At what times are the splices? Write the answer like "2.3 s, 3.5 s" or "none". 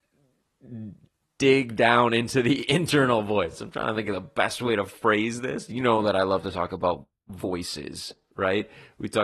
none

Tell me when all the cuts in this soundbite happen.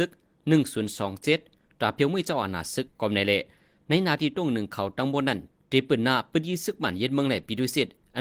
2.9 s

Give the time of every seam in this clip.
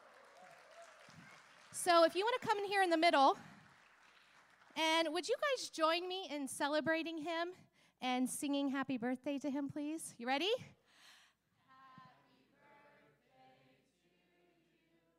none

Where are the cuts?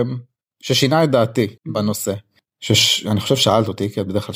1.6 s

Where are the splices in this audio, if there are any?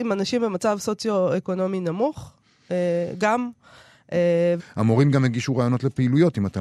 4.6 s

